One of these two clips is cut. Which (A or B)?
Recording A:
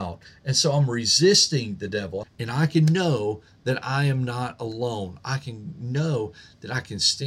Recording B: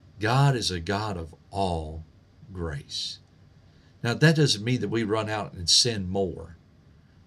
A